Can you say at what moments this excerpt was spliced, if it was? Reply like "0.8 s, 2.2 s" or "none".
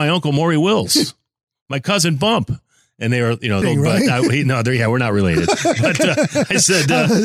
3.6 s